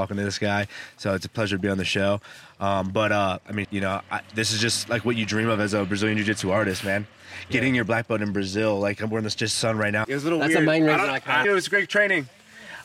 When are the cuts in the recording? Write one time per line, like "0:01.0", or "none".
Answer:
0:03.6
0:10.0
0:11.4